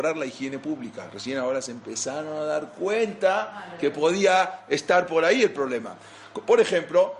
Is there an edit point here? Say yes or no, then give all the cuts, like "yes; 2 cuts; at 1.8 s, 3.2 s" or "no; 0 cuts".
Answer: no; 0 cuts